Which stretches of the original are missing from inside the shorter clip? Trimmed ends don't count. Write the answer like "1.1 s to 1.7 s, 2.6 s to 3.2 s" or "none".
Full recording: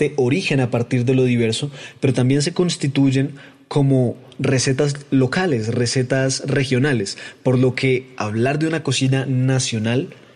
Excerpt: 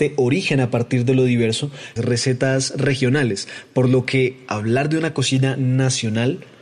2.0 s to 5.7 s